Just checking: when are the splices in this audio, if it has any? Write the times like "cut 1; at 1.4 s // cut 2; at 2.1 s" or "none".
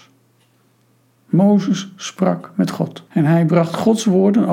cut 1; at 3.1 s

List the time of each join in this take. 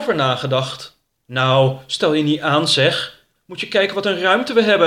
cut 1; at 1.2 s

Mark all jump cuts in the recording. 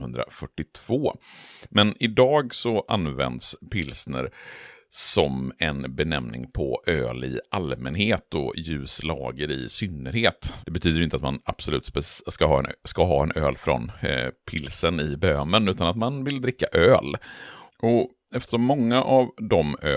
cut 1; at 10.6 s // cut 2; at 17.7 s

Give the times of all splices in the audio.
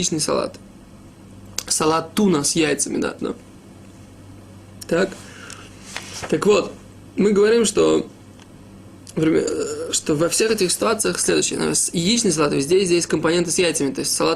cut 1; at 3.2 s

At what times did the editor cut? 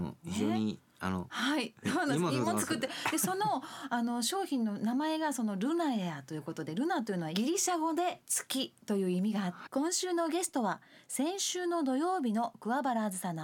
cut 1; at 1.3 s // cut 2; at 9.7 s

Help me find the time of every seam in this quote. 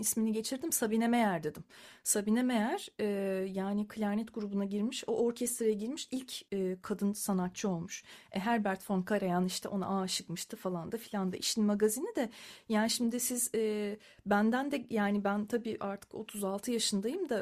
none

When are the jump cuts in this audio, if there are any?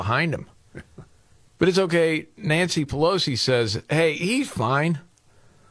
cut 1; at 1.5 s

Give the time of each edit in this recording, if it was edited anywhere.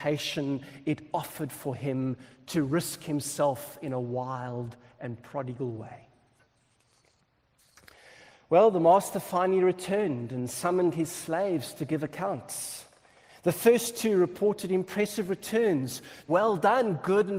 cut 1; at 16.3 s

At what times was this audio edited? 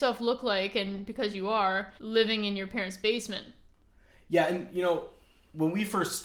cut 1; at 2.0 s

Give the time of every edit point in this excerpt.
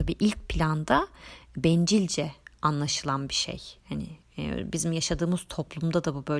none

